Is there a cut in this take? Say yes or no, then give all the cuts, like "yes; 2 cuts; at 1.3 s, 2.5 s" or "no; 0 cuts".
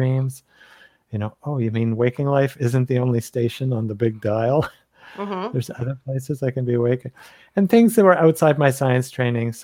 no; 0 cuts